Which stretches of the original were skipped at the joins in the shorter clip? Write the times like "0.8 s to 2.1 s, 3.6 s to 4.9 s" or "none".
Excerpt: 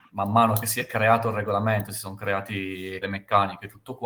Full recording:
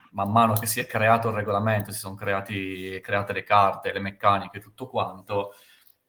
3.0 s to 3.9 s